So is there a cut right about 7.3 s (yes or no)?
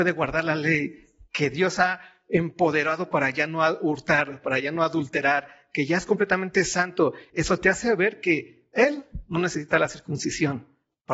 yes